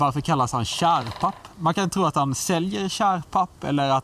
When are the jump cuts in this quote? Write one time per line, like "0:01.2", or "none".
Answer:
none